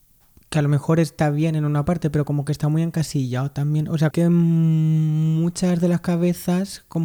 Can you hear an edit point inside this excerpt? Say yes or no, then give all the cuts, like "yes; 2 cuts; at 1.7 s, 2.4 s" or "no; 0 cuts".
yes; 1 cut; at 4.1 s